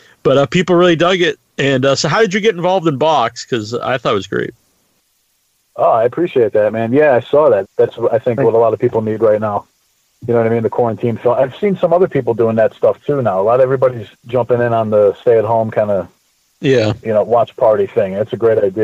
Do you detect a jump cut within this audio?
yes; 2 cuts; at 7.6 s, 14.1 s

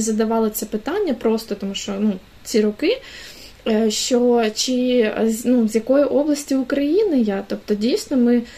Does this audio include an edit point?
no; 0 cuts

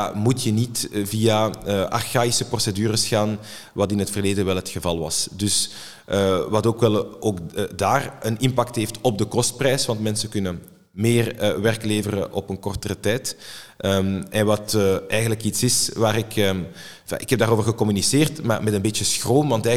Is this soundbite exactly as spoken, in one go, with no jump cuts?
yes; 0 cuts

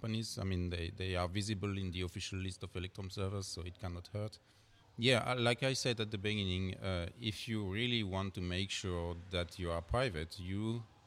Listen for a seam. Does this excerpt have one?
yes; 1 cut; at 4.8 s

